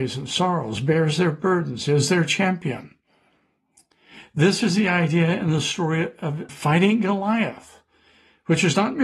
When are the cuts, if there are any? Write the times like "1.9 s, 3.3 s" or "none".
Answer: 6.5 s